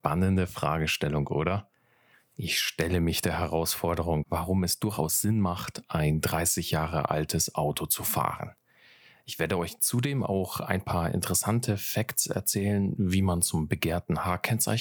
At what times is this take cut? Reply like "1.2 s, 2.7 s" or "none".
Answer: 4.2 s

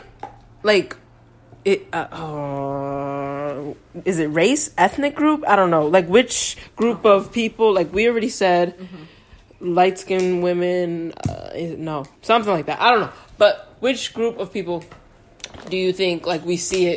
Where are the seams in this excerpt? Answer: 12.2 s

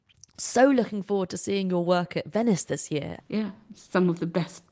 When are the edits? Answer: 3.2 s

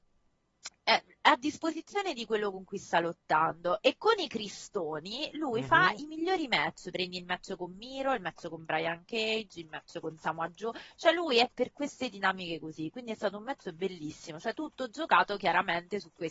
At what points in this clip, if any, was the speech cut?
11.5 s

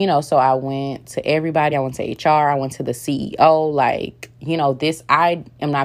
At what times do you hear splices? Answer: none

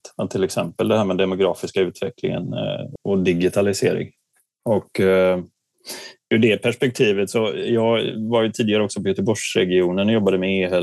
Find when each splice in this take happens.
3.0 s

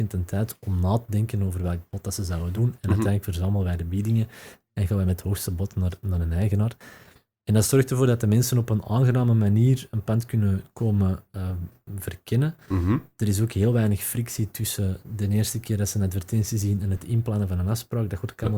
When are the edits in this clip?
none

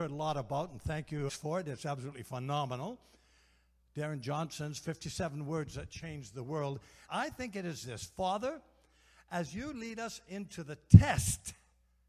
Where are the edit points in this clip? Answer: 1.3 s, 7.1 s

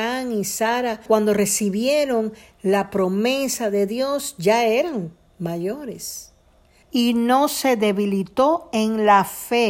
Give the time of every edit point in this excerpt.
1.1 s, 6.8 s

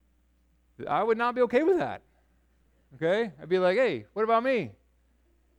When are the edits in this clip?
none

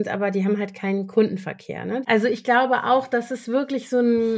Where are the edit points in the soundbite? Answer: 2.0 s

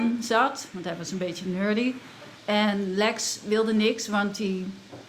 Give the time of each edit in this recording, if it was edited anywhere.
2.4 s

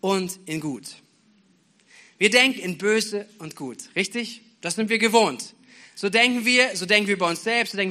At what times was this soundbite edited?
none

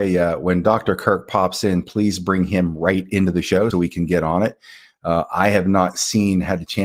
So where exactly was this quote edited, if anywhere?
3.7 s

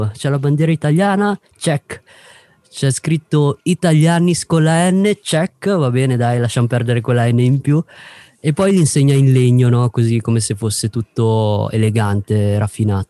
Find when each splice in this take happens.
none

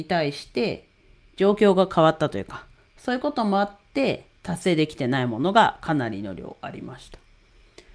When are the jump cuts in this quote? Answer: 4.4 s

